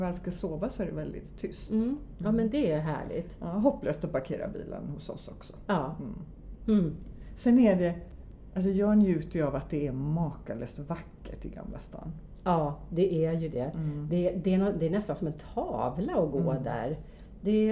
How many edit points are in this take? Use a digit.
0